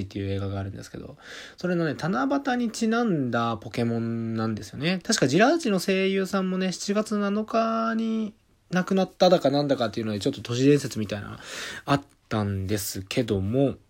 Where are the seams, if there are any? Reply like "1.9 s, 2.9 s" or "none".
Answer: 5.0 s